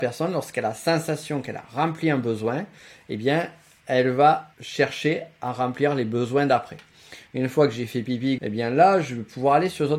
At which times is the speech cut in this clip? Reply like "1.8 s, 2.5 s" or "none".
4.5 s, 7.3 s, 8.4 s